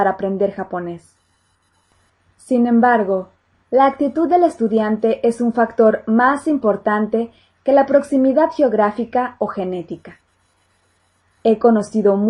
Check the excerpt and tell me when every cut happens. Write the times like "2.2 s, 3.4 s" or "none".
none